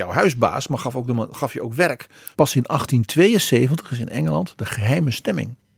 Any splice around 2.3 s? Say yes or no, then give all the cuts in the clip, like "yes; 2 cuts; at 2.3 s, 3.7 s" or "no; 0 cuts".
yes; 1 cut; at 2.3 s